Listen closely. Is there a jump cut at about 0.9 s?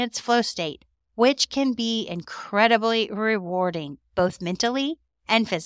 no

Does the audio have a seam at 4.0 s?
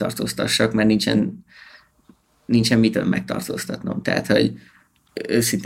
no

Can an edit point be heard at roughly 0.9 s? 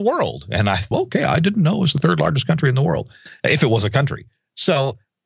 yes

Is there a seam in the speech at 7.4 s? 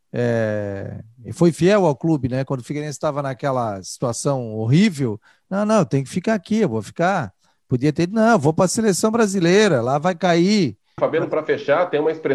no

